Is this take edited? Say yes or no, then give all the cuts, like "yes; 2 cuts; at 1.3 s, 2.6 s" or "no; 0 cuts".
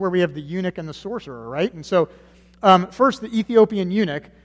no; 0 cuts